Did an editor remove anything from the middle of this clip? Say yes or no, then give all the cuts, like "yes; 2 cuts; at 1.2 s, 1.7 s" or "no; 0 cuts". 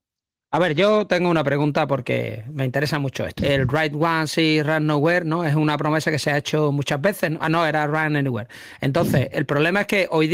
yes; 2 cuts; at 3.4 s, 9.3 s